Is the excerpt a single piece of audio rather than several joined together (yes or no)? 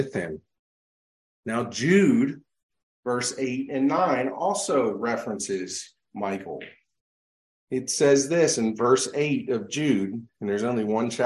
yes